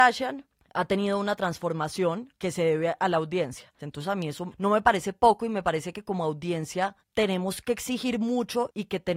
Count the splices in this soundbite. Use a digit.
2